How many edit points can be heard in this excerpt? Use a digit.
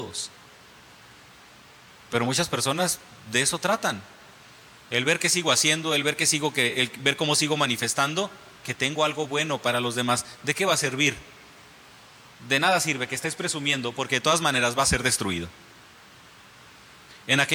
1